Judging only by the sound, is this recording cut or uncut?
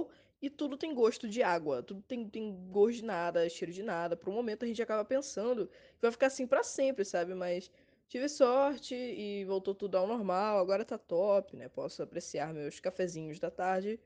cut